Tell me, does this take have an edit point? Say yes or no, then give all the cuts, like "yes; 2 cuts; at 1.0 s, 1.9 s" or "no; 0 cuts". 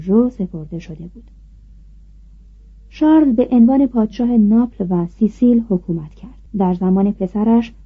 yes; 1 cut; at 6.5 s